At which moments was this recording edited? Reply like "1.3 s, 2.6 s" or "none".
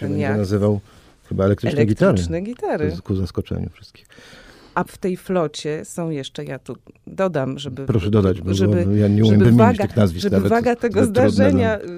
none